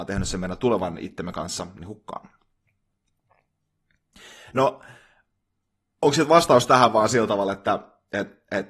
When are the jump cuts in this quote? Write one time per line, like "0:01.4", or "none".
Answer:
none